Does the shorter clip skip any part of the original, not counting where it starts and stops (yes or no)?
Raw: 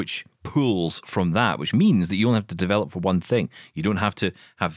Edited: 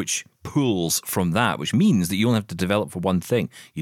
no